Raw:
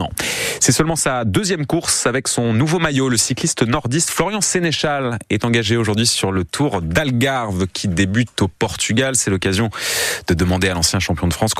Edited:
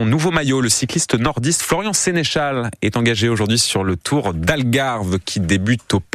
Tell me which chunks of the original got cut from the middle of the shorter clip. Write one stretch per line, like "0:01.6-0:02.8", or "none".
none